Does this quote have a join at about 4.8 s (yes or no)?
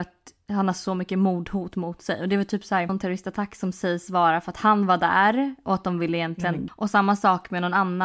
no